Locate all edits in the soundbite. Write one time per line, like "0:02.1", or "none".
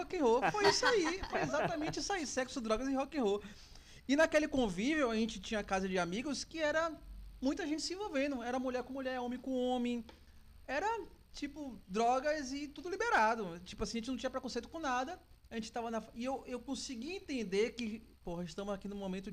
none

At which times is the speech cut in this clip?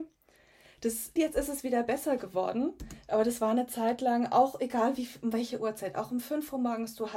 0:01.2

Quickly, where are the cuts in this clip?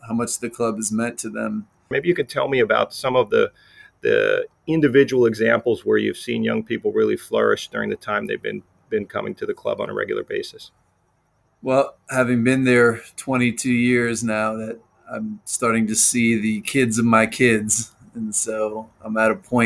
0:01.9

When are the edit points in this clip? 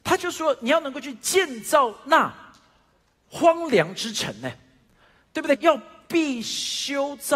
0:05.6

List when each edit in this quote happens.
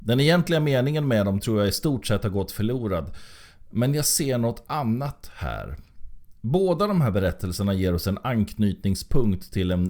none

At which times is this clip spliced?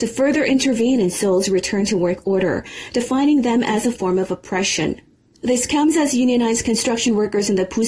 0:05.3

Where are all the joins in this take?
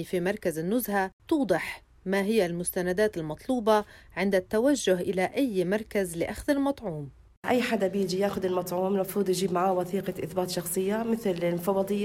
0:01.2

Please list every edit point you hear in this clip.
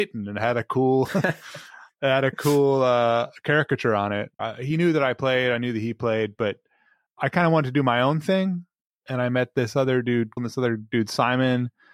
0:04.4
0:10.4

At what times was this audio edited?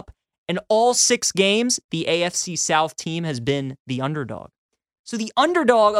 none

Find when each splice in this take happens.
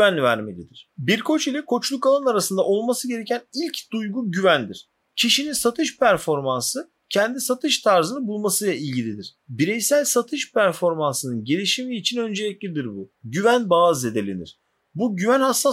0:05.1
0:09.4
0:13.1

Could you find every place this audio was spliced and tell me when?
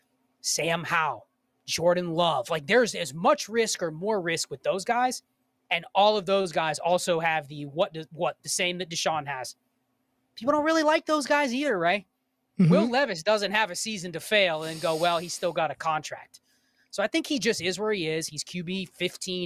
none

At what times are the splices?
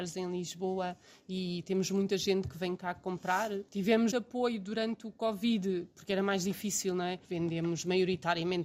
0:04.1
0:07.2

